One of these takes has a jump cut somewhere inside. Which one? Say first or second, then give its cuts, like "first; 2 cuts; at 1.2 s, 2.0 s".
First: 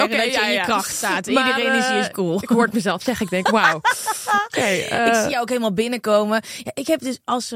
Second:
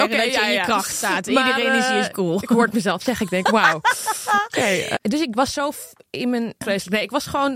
second; 2 cuts; at 5.0 s, 6.6 s